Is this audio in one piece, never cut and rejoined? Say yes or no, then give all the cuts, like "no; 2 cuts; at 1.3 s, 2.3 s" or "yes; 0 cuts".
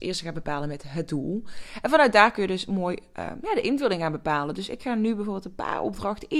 yes; 0 cuts